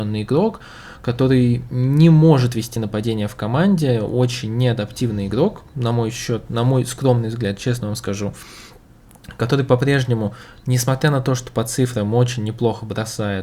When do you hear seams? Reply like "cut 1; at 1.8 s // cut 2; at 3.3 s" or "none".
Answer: none